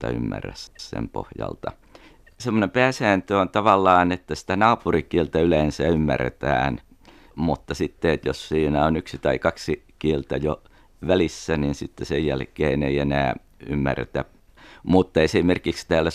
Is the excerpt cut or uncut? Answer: uncut